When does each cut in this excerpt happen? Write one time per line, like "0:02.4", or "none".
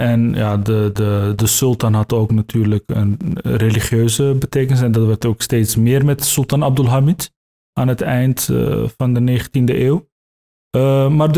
none